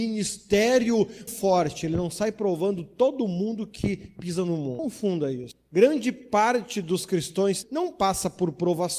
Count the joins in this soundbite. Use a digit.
2